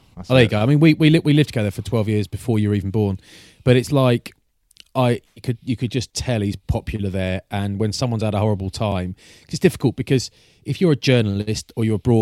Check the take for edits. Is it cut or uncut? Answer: uncut